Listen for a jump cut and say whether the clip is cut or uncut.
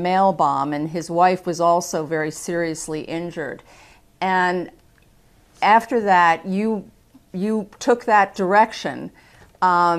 uncut